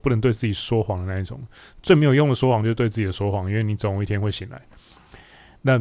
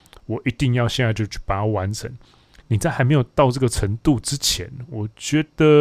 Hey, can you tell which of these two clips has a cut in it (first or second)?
second